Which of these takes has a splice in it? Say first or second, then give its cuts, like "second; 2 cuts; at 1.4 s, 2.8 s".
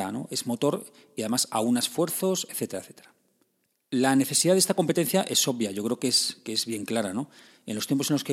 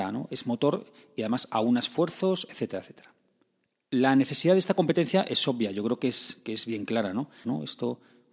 second; 1 cut; at 7.4 s